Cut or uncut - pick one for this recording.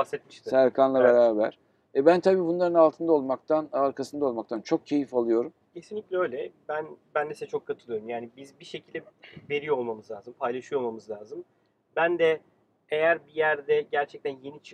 cut